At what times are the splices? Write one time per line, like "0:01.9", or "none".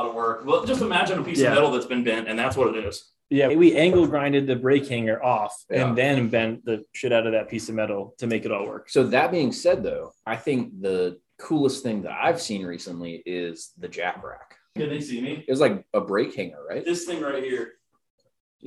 0:03.5
0:14.8